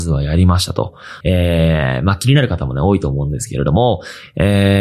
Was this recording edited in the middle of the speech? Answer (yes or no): yes